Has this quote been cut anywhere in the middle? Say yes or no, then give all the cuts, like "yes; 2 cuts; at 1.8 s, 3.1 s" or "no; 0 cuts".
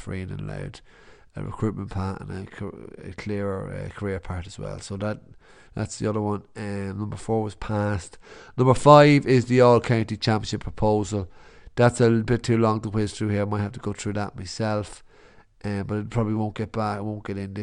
no; 0 cuts